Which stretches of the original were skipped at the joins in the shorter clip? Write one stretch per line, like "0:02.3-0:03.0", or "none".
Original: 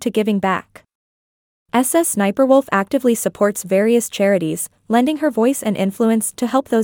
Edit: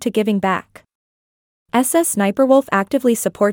none